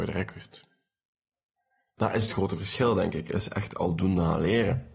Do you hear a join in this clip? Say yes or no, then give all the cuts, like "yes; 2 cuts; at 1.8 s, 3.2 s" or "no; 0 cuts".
yes; 1 cut; at 2.0 s